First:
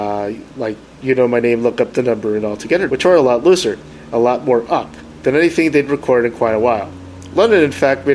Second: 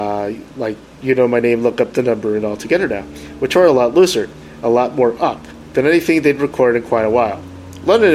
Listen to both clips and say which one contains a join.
first; 1 cut; at 2.9 s

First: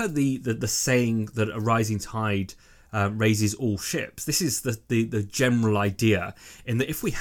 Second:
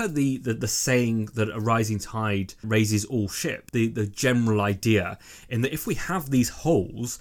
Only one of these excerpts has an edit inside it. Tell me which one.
second; 2 cuts; at 2.6 s, 3.7 s

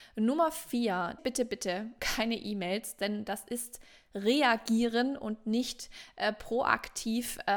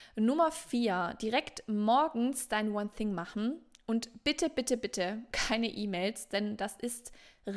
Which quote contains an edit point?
first; 1 cut; at 1.2 s

